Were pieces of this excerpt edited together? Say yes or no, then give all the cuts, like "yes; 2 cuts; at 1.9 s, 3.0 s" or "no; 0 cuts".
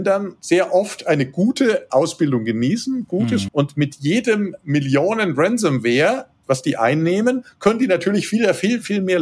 yes; 1 cut; at 3.5 s